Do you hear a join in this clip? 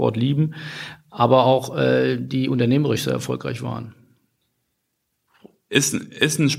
no; 0 cuts

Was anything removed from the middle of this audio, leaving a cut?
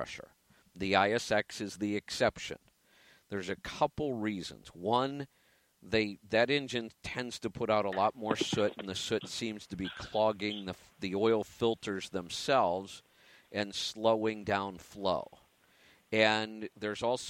no; 0 cuts

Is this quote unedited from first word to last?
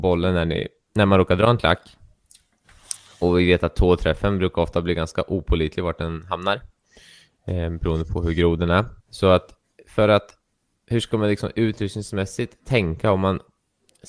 no; 1 cut; at 9.0 s

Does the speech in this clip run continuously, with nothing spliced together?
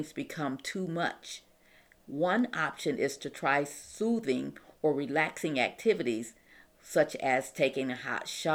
no; 1 cut; at 2.0 s

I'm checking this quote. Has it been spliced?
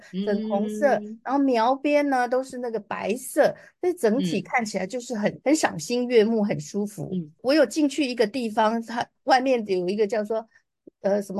no; 0 cuts

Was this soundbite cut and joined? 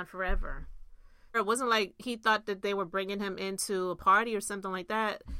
yes; 1 cut; at 1.3 s

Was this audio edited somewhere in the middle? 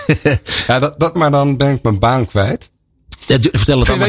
yes; 1 cut; at 1.1 s

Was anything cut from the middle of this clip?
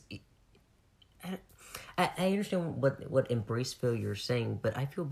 no; 0 cuts

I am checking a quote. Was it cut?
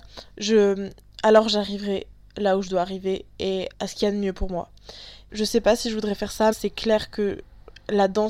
yes; 3 cuts; at 3.7 s, 5.3 s, 6.5 s

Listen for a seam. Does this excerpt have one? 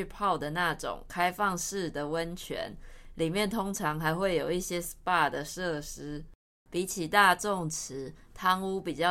yes; 1 cut; at 6.7 s

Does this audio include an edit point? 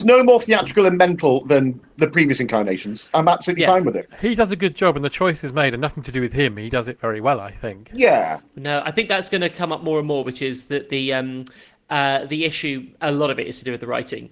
no; 0 cuts

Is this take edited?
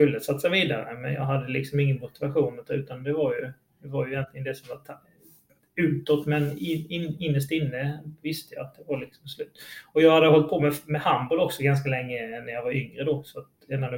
no; 0 cuts

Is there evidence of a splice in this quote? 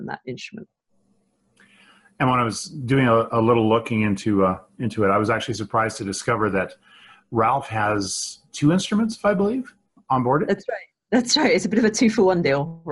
no; 0 cuts

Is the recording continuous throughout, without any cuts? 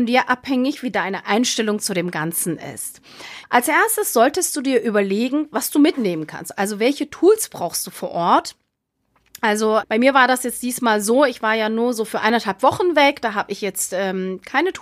no; 2 cuts; at 3.4 s, 9.8 s

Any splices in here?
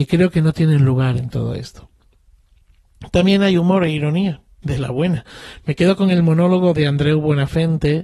yes; 1 cut; at 4.6 s

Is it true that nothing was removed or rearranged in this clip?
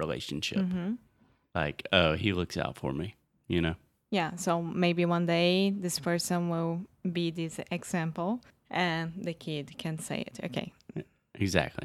yes; 0 cuts

